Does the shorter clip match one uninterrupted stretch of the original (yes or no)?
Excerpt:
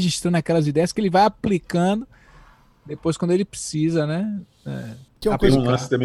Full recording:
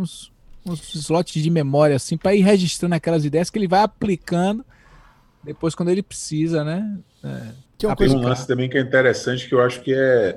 yes